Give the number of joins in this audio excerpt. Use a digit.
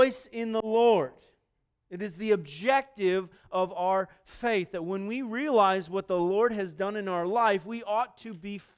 0